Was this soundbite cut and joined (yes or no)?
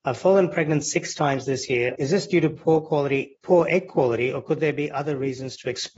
yes